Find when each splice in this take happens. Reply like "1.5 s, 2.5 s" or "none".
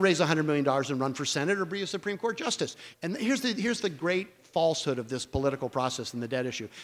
2.9 s